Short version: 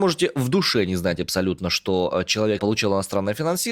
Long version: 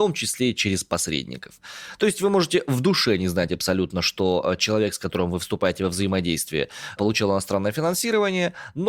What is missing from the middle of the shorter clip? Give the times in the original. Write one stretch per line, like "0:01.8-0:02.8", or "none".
0:04.9-0:07.0